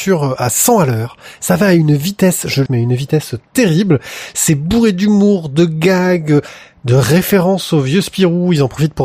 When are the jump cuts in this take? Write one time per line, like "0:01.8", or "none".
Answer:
0:02.7